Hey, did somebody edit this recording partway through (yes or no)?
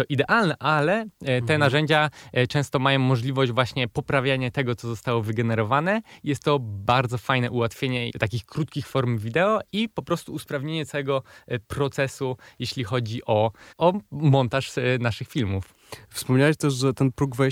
yes